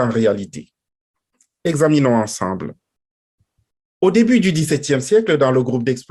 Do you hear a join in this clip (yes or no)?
no